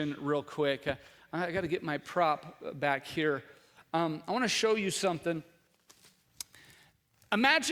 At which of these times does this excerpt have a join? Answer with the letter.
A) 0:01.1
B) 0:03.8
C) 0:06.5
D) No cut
D